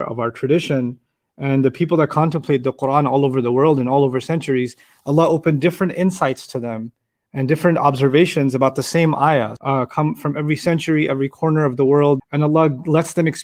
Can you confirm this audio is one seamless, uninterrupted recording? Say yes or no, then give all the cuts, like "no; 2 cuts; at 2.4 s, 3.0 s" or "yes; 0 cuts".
no; 2 cuts; at 9.6 s, 12.2 s